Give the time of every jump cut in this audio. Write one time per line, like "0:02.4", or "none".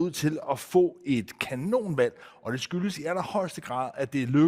none